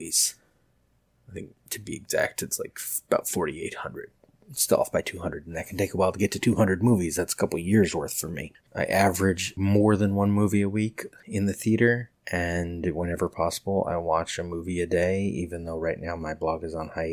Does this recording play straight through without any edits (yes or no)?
yes